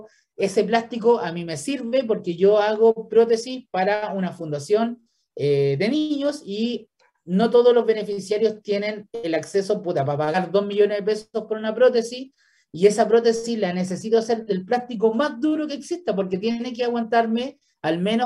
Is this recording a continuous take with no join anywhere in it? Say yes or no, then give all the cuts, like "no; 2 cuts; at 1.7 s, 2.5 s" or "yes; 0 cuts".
yes; 0 cuts